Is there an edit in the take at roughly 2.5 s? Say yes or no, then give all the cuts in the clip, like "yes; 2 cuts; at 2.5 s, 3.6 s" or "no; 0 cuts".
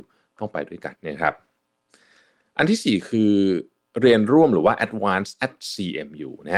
no; 1 cut; at 0.9 s